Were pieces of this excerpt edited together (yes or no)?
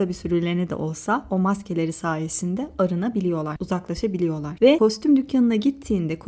yes